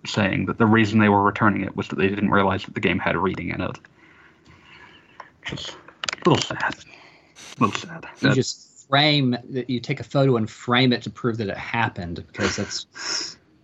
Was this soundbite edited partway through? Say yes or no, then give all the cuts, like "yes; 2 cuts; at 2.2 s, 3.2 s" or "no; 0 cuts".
yes; 2 cuts; at 8.2 s, 11.0 s